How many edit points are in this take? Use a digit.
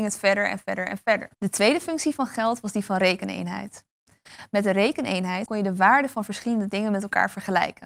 2